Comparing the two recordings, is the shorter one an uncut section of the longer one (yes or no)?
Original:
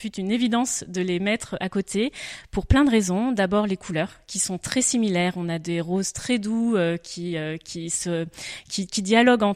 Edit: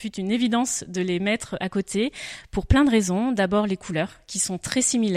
yes